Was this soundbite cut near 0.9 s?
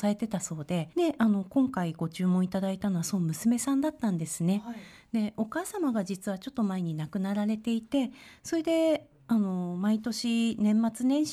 yes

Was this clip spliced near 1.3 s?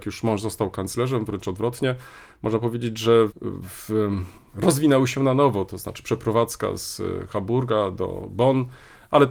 no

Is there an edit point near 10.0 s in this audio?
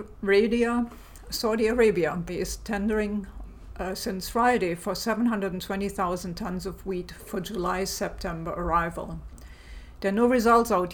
no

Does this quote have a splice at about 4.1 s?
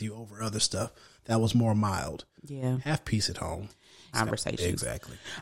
yes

